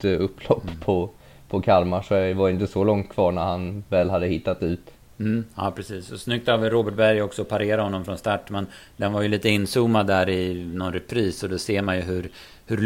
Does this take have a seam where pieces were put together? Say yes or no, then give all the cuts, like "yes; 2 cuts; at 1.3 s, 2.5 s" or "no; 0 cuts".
no; 0 cuts